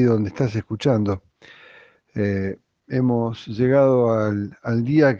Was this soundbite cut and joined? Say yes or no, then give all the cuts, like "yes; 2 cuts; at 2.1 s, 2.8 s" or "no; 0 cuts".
no; 0 cuts